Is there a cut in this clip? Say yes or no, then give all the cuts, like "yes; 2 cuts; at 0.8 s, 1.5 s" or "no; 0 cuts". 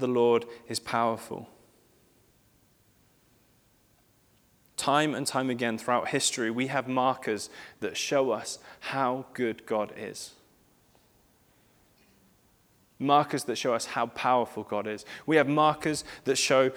no; 0 cuts